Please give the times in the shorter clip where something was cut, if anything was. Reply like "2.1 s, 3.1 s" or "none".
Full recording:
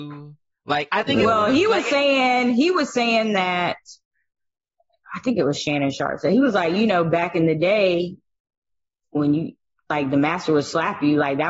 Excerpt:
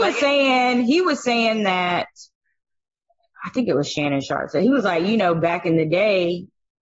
none